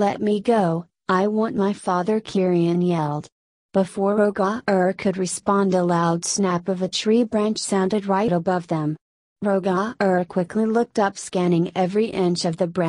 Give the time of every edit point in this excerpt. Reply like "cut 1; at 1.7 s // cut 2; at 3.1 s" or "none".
none